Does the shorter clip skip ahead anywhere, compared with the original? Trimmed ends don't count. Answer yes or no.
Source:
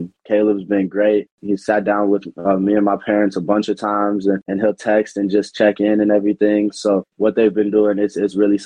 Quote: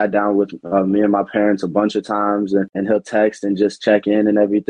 no